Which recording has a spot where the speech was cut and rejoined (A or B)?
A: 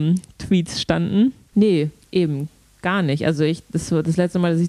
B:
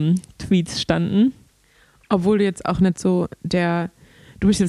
A